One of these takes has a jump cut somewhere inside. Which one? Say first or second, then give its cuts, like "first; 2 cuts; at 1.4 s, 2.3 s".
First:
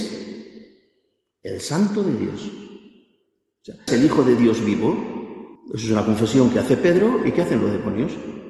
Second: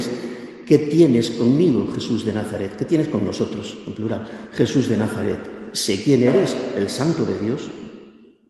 first; 2 cuts; at 3.9 s, 5.6 s